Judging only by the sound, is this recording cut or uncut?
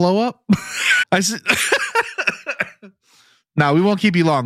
cut